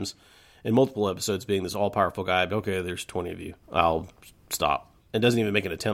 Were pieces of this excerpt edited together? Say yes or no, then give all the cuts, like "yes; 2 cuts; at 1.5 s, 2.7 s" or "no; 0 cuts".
yes; 3 cuts; at 2.5 s, 3.6 s, 5.0 s